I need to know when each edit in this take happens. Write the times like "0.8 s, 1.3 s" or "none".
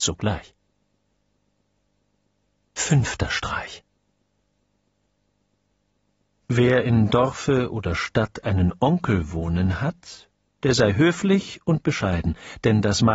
none